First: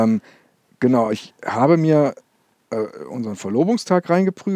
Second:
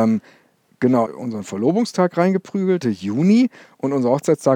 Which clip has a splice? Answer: second; 2 cuts; at 1.1 s, 2.8 s

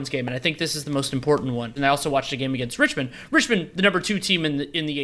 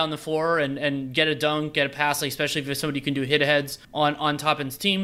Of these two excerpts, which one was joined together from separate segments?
first; 1 cut; at 1.8 s

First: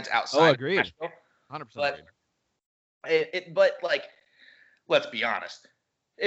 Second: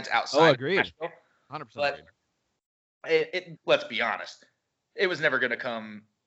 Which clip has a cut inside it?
second; 1 cut; at 3.6 s

